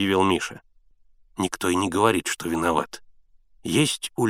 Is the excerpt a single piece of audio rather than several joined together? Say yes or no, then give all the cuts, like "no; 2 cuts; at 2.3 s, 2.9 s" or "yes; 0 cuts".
yes; 0 cuts